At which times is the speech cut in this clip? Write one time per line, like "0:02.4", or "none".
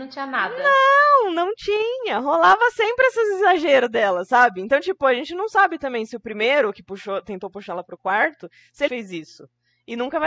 0:08.9